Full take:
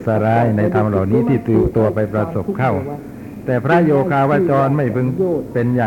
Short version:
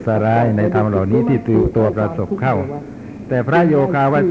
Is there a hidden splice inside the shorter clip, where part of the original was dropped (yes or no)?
yes